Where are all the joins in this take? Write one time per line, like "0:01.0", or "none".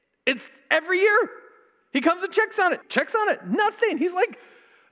0:02.8